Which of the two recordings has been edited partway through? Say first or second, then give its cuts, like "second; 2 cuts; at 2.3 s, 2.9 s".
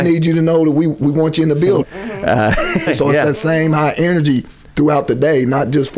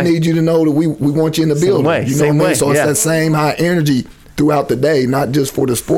first; 2 cuts; at 1.8 s, 2.9 s